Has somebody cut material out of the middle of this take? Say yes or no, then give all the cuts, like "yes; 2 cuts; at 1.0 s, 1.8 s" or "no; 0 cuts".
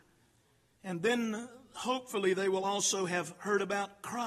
no; 0 cuts